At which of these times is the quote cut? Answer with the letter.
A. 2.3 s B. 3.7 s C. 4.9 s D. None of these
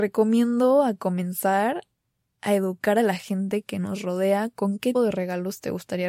C